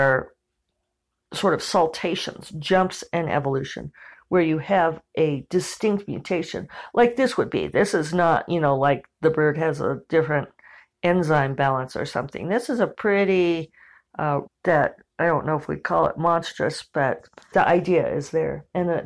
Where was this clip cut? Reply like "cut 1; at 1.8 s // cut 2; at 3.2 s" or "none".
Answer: cut 1; at 14.4 s // cut 2; at 17.5 s